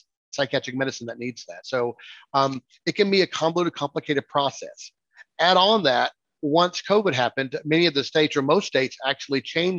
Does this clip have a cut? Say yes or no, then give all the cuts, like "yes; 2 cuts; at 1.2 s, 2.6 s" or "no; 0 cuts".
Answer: no; 0 cuts